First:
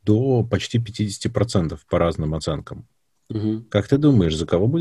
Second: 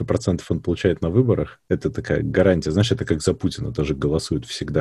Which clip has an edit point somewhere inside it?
second; 1 cut; at 1.6 s

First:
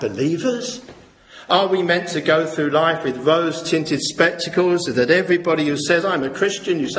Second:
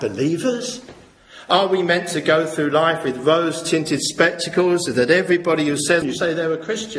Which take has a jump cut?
second; 1 cut; at 6.0 s

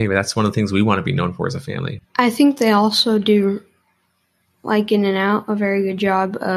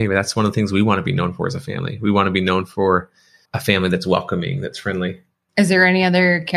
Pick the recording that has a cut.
first; 1 cut; at 2.0 s

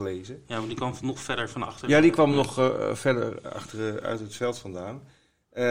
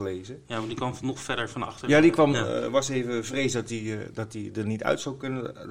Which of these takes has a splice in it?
second; 1 cut; at 2.3 s

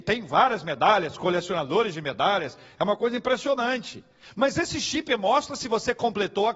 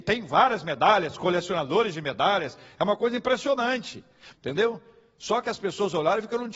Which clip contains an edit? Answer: second; 1 cut; at 4.3 s

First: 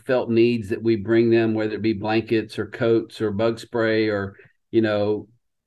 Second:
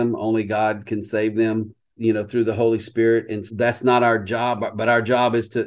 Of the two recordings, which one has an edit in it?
second; 2 cuts; at 2.0 s, 3.5 s

